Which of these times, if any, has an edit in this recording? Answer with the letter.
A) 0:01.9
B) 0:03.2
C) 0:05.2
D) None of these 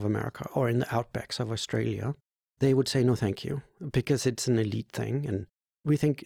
D